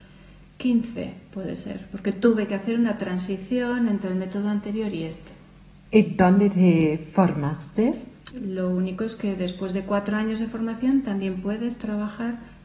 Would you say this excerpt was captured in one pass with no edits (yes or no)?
no